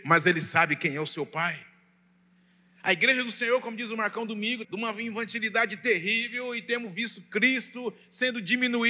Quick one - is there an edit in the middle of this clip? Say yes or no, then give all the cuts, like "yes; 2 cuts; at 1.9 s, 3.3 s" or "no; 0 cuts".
yes; 1 cut; at 4.6 s